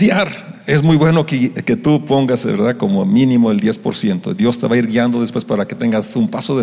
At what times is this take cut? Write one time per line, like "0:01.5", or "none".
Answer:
none